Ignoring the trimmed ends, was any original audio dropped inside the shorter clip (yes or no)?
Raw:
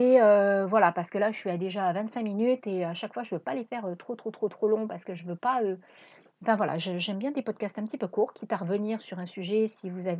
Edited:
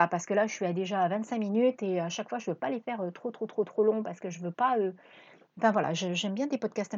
no